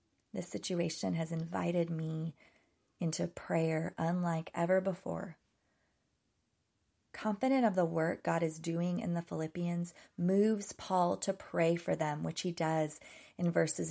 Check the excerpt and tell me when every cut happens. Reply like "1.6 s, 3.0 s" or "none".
none